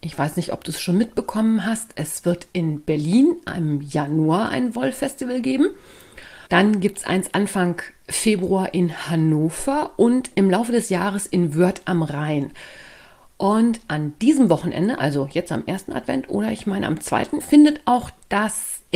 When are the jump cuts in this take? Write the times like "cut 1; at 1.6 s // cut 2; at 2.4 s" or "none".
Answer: cut 1; at 6.5 s // cut 2; at 17.4 s

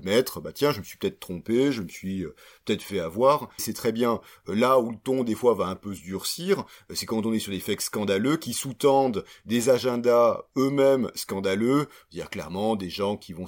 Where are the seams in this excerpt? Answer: cut 1; at 3.6 s

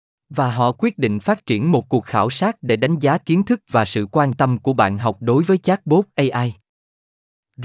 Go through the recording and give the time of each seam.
none

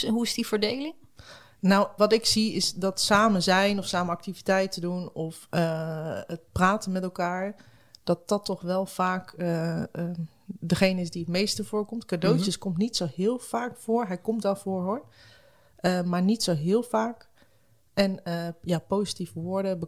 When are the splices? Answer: cut 1; at 2.0 s

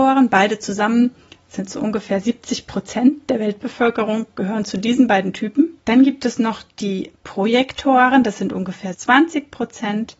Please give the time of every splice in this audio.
cut 1; at 5.8 s // cut 2; at 8.9 s

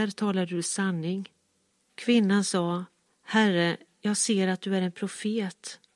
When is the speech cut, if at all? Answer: none

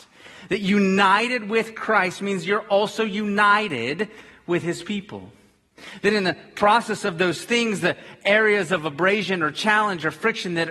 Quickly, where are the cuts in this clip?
none

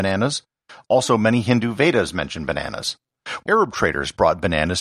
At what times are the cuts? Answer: cut 1; at 3.4 s

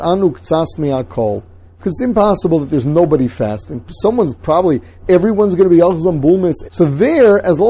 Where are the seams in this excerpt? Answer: cut 1; at 6.6 s

